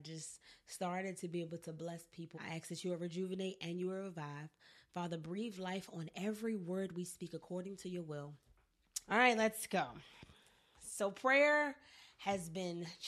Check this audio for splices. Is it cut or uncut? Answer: cut